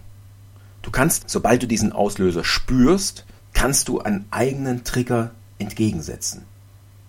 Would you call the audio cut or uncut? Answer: cut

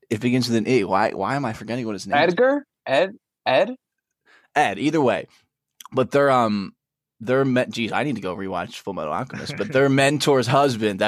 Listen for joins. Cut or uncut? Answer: uncut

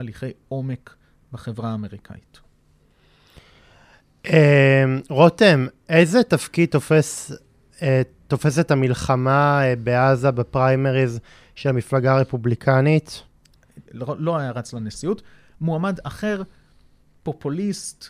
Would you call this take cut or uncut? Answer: cut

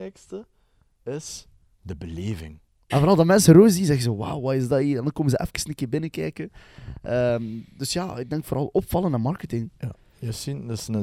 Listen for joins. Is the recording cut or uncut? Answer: cut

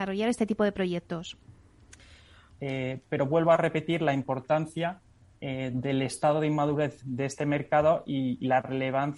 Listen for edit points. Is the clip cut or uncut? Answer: cut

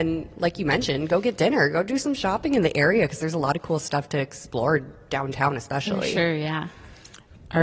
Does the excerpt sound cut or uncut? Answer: uncut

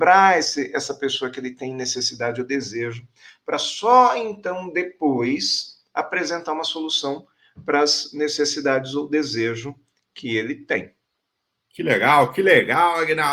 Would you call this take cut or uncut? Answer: uncut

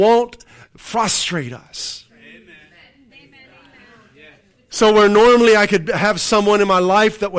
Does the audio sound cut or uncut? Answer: cut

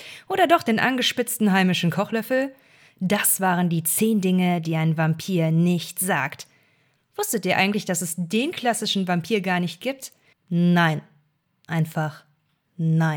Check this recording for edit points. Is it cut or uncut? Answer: cut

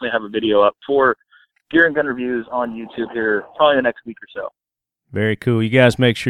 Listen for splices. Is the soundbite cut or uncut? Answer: uncut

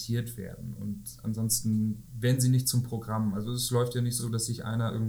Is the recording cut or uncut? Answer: uncut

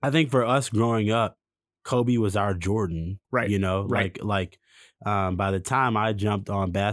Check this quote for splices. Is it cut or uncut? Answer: cut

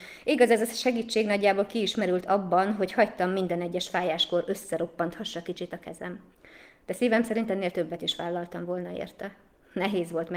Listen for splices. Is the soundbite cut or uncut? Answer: uncut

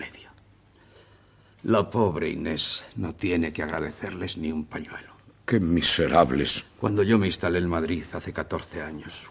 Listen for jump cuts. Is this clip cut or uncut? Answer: uncut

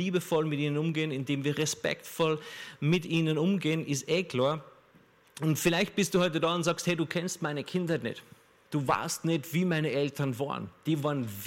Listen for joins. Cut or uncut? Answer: uncut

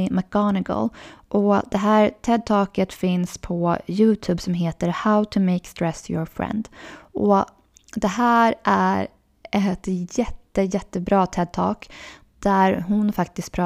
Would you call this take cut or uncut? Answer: uncut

